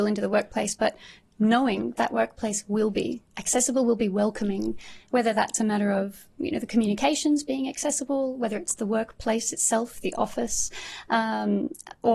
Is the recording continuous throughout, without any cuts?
no; 1 cut; at 1.9 s

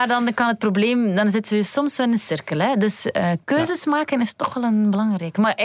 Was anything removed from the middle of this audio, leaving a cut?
no; 0 cuts

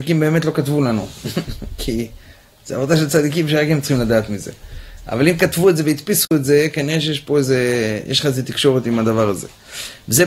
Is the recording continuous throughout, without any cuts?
yes; 0 cuts

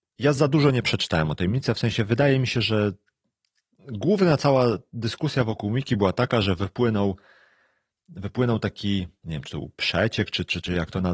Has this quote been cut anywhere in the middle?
no; 0 cuts

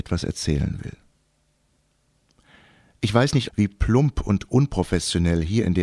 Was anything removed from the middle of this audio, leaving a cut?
yes; 1 cut; at 3.5 s

